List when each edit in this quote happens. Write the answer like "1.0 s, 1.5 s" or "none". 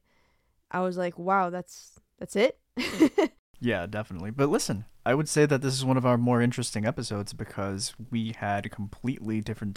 4.9 s